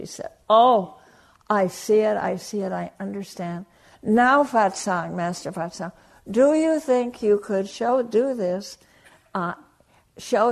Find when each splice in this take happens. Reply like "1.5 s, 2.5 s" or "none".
none